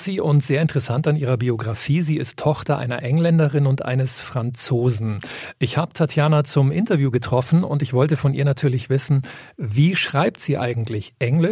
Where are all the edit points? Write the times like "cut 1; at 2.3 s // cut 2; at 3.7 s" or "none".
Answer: none